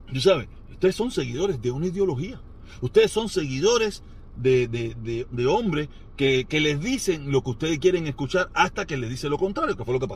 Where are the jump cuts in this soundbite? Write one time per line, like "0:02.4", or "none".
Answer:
0:05.3

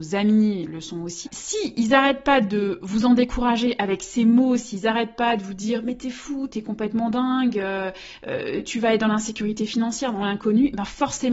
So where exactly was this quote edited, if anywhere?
0:01.3

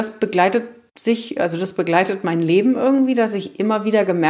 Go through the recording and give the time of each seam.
none

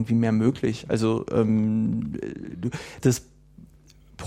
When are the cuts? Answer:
0:03.0

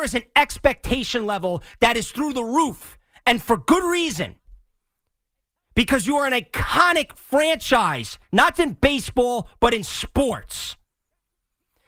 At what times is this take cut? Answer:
0:08.5

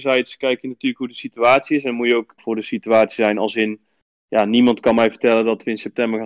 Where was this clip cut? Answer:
0:02.4

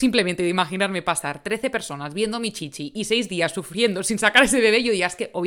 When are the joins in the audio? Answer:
none

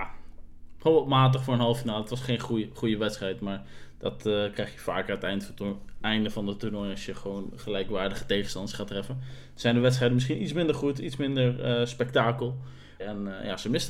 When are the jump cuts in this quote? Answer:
0:13.0

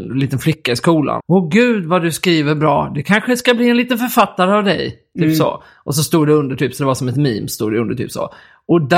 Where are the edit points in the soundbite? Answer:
0:01.2

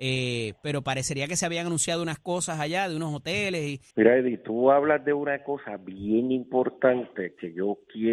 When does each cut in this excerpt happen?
0:03.9

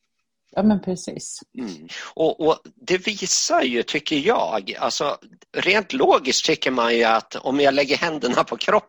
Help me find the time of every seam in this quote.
0:01.9

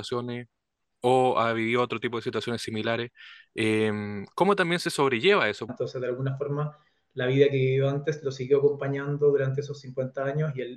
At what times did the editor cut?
0:05.7

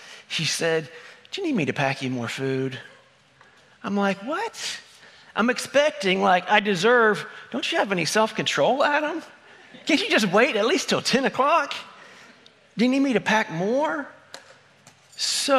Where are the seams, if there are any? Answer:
none

